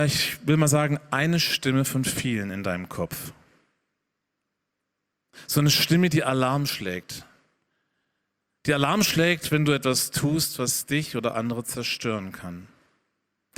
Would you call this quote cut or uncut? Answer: uncut